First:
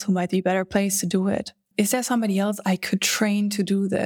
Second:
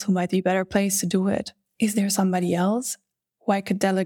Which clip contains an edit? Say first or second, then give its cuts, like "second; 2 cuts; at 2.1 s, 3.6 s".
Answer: first; 1 cut; at 1.7 s